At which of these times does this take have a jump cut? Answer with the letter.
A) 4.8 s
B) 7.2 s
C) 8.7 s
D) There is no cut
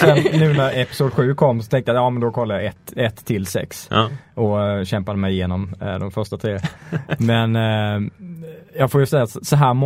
D